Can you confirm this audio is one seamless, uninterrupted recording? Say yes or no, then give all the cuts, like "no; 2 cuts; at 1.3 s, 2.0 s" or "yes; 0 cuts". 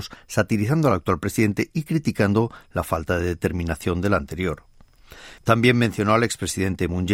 no; 1 cut; at 5.4 s